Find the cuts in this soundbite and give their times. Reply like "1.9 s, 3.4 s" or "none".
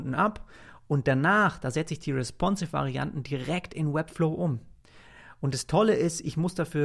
none